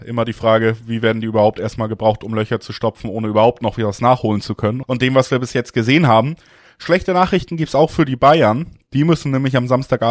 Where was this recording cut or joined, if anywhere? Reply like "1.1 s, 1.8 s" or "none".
4.8 s